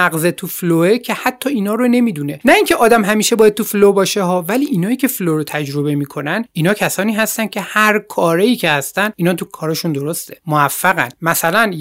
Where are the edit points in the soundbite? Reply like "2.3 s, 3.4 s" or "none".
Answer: 9.5 s